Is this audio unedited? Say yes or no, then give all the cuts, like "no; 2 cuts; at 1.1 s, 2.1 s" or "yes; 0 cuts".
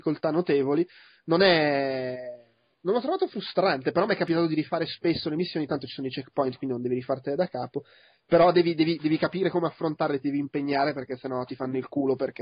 yes; 0 cuts